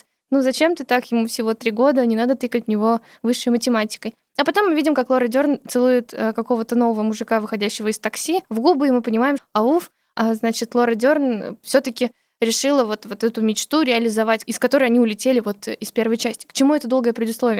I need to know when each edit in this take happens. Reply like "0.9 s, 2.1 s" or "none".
9.4 s